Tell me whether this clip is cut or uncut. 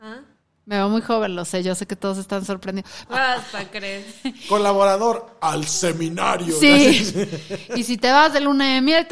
cut